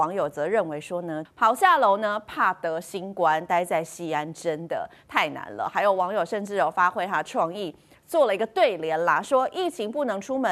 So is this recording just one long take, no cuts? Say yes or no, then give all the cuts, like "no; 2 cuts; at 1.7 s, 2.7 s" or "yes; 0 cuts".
no; 1 cut; at 1.3 s